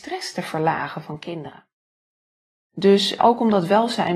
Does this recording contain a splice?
yes; 1 cut; at 3.2 s

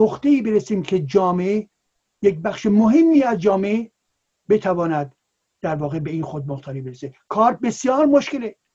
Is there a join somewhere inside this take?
no; 0 cuts

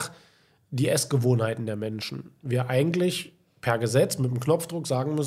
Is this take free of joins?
yes; 0 cuts

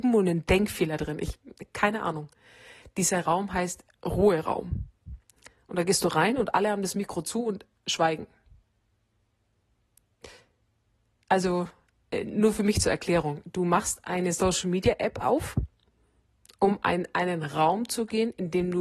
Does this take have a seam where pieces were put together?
no; 0 cuts

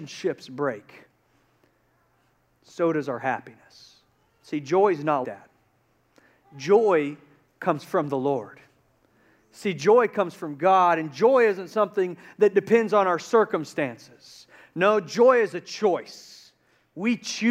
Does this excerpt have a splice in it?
yes; 1 cut; at 5.2 s

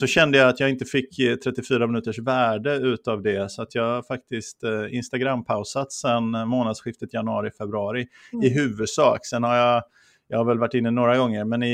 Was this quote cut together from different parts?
no; 0 cuts

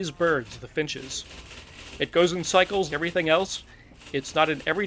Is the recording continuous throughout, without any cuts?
no; 1 cut; at 2.9 s

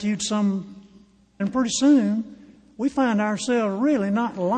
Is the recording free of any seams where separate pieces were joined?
no; 1 cut; at 1.4 s

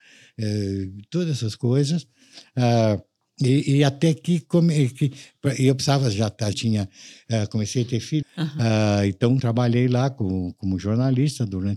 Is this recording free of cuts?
no; 3 cuts; at 6.5 s, 8.2 s, 9.4 s

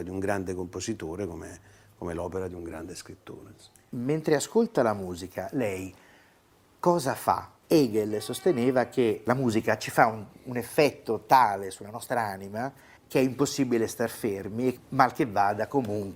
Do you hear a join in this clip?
yes; 3 cuts; at 7.6 s, 13.0 s, 14.8 s

